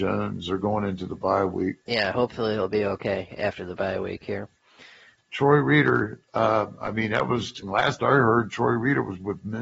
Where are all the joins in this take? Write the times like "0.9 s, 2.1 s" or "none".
1.8 s, 5.2 s, 7.6 s